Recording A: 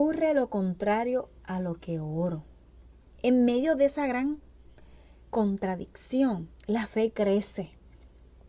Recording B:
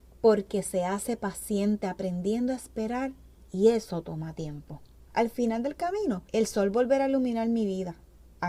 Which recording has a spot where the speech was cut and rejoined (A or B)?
B